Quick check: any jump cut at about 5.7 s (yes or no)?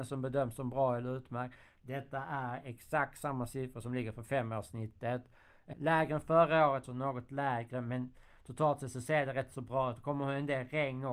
yes